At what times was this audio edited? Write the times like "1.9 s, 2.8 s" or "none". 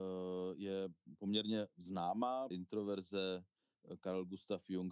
2.5 s